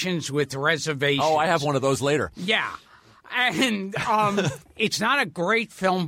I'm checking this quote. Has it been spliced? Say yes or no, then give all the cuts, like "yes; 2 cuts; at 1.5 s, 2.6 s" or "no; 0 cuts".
yes; 1 cut; at 4.6 s